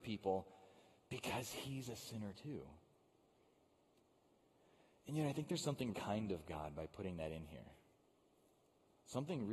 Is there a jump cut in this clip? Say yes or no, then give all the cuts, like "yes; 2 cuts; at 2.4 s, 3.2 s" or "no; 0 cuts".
yes; 1 cut; at 5.9 s